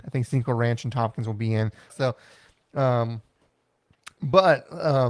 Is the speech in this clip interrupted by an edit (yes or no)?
yes